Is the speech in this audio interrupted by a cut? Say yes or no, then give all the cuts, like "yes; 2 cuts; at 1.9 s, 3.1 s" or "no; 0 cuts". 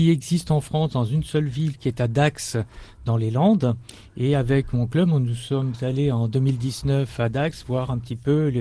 no; 0 cuts